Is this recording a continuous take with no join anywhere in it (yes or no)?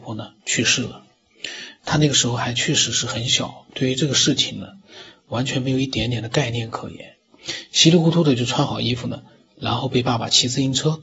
yes